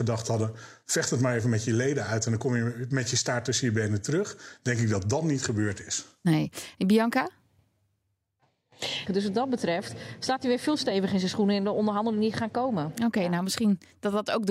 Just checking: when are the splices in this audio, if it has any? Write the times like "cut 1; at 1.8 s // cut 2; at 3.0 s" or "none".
cut 1; at 9.1 s